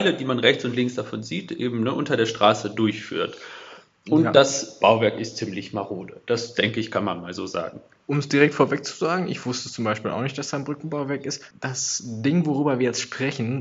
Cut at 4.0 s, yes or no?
no